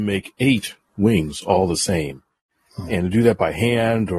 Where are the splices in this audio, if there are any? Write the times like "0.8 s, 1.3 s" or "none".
none